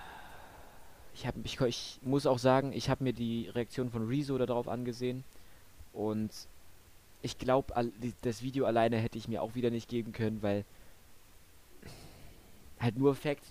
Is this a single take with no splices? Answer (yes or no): yes